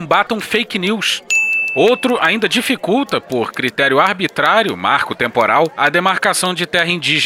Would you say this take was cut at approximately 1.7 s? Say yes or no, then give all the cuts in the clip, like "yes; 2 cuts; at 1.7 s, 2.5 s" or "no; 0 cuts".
no; 0 cuts